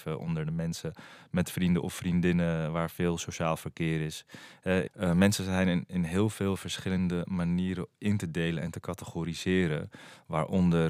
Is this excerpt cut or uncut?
cut